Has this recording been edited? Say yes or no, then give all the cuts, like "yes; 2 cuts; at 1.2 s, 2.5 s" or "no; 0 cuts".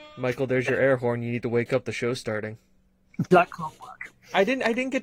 yes; 1 cut; at 3.3 s